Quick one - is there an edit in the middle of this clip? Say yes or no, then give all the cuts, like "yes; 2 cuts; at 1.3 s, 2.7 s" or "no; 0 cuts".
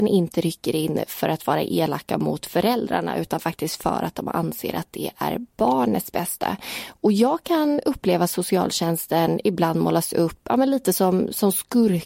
no; 0 cuts